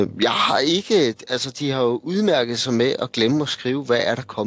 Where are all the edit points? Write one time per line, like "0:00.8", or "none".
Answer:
none